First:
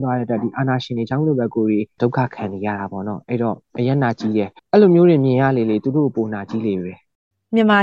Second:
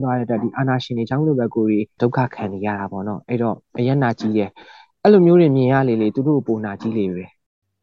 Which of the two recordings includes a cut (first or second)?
first